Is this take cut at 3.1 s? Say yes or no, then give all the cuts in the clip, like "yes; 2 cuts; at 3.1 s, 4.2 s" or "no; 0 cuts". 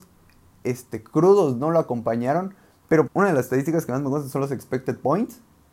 yes; 1 cut; at 3.1 s